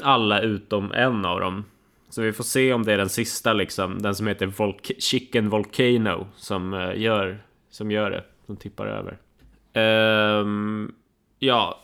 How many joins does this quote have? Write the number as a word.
zero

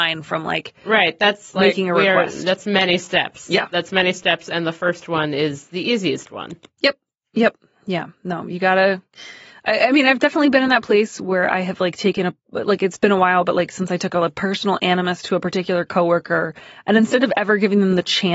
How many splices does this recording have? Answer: zero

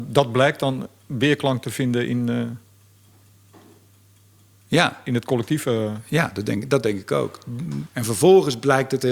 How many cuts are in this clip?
one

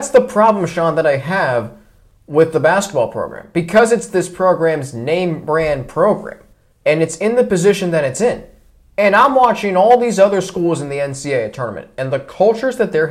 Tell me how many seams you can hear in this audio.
one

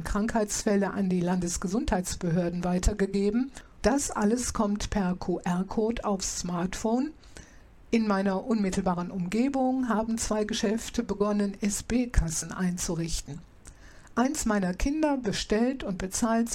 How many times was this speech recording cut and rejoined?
one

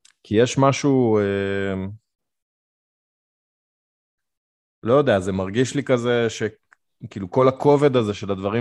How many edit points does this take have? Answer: zero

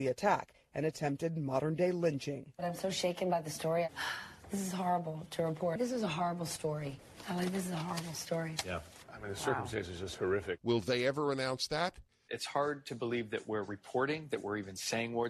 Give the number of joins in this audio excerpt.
two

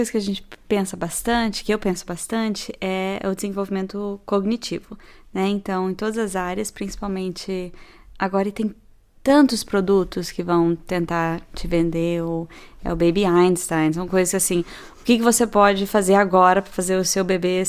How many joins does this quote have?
zero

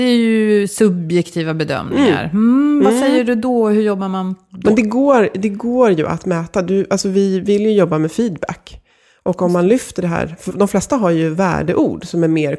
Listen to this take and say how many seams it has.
one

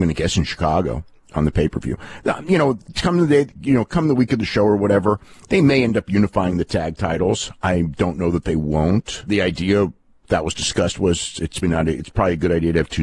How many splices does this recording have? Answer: two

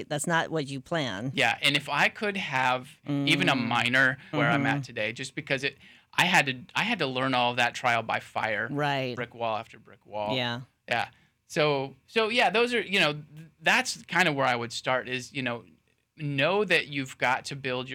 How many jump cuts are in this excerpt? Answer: three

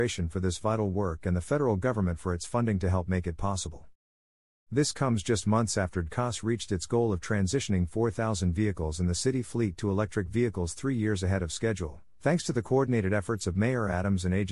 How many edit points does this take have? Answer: one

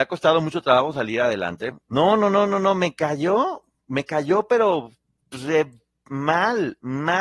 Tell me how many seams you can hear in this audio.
one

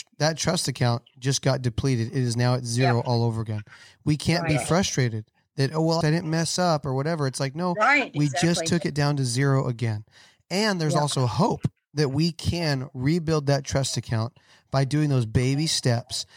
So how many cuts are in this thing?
one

